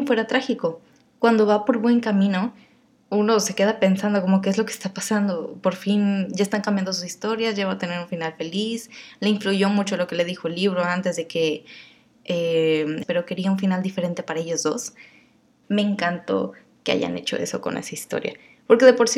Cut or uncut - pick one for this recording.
cut